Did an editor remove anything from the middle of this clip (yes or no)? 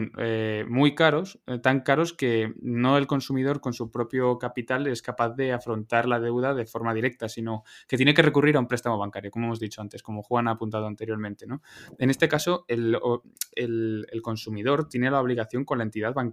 no